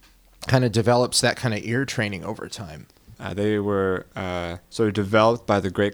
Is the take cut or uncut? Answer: cut